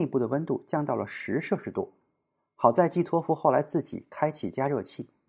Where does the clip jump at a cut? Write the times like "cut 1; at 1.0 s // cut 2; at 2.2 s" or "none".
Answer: none